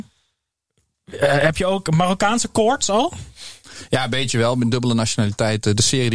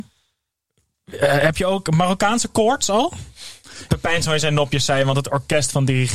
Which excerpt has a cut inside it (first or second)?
second